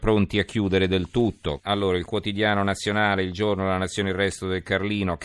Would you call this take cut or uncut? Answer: cut